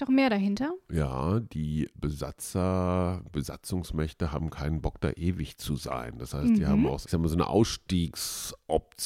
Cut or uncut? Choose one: cut